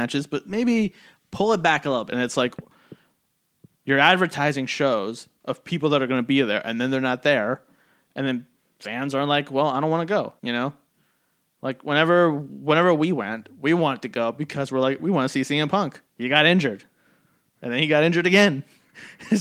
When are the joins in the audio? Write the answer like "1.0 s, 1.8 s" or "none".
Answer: 2.1 s, 10.4 s, 16.1 s